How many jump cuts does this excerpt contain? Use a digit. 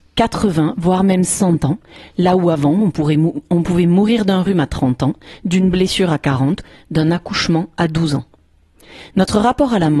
0